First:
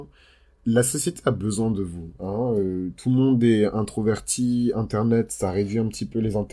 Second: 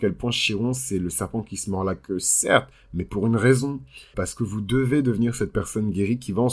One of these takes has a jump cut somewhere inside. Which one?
second; 1 cut; at 4.1 s

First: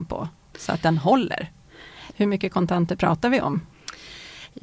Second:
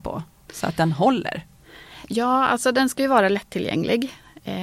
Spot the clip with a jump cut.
first; 1 cut; at 2.1 s

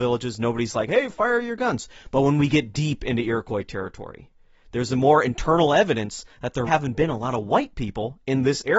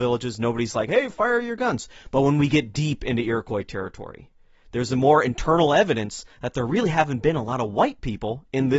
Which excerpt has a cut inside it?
first; 1 cut; at 6.7 s

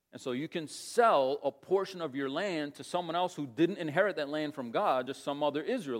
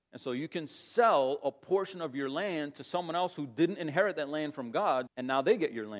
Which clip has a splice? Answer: second; 1 cut; at 5.1 s

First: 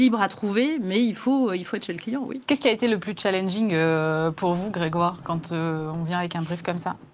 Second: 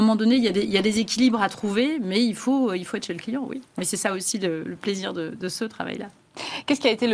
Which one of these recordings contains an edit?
first; 1 cut; at 2.4 s

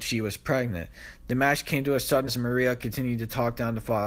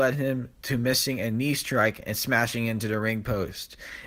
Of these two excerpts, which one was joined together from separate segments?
first; 1 cut; at 2.3 s

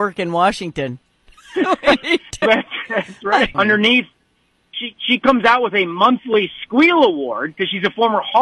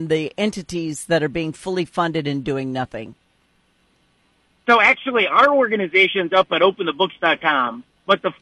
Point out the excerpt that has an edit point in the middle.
first; 2 cuts; at 2.4 s, 3.5 s

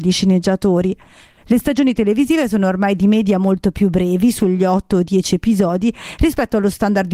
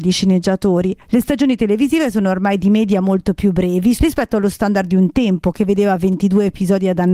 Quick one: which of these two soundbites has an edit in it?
second; 2 cuts; at 1.0 s, 4.0 s

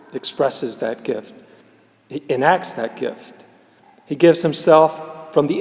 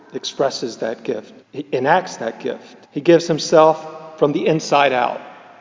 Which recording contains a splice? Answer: second; 2 cuts; at 1.4 s, 2.8 s

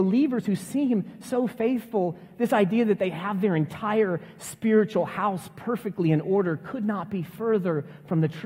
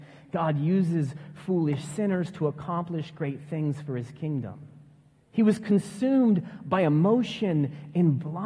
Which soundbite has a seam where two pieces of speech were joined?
second; 1 cut; at 5.2 s

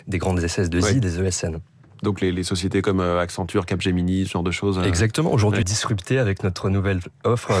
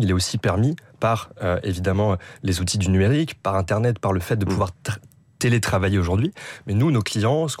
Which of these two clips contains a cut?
first; 1 cut; at 5.6 s

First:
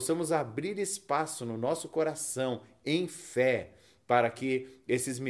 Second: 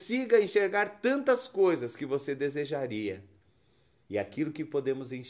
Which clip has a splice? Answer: second; 1 cut; at 4.0 s

